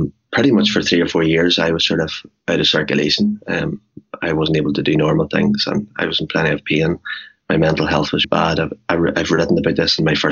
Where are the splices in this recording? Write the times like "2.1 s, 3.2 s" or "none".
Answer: 8.2 s